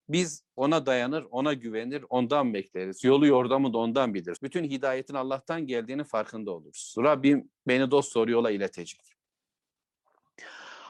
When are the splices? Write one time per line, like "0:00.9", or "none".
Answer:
0:04.4